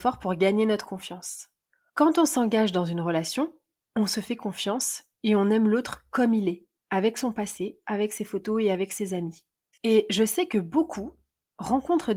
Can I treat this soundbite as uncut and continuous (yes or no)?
no